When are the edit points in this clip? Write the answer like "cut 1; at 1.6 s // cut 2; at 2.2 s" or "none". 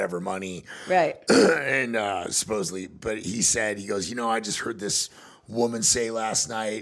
none